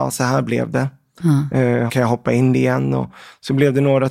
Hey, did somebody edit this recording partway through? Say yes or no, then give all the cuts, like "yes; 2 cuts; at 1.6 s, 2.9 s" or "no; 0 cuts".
yes; 1 cut; at 1.9 s